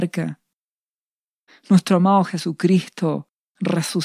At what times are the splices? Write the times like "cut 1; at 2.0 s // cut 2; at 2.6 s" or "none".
cut 1; at 1.5 s